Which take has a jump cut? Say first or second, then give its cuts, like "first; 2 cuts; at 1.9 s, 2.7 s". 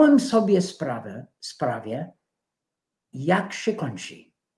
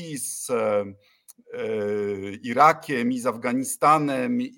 first; 1 cut; at 3.1 s